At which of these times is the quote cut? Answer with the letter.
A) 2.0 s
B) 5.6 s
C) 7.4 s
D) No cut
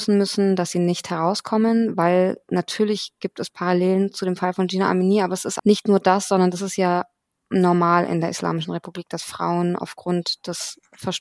B